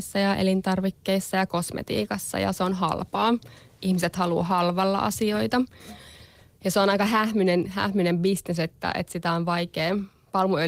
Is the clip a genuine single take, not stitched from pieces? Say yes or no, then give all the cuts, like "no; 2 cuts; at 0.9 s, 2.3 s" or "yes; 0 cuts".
yes; 0 cuts